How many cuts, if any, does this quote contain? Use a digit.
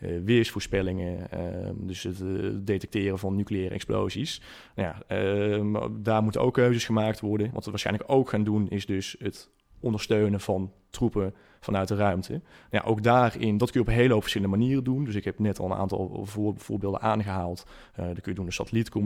1